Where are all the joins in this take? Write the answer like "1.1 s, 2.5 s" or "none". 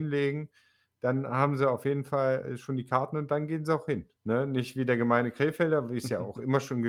4.2 s